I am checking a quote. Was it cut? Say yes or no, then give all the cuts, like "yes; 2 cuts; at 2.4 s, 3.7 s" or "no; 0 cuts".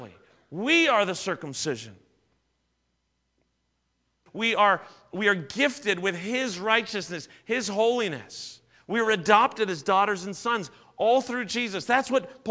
yes; 1 cut; at 4.3 s